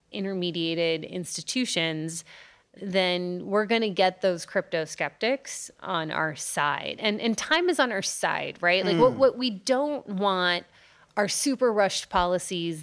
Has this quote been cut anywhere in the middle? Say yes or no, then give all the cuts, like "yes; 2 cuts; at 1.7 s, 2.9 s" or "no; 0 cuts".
no; 0 cuts